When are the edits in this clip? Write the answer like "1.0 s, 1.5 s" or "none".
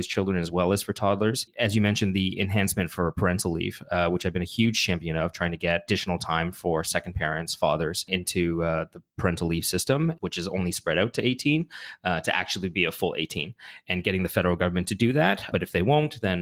10.2 s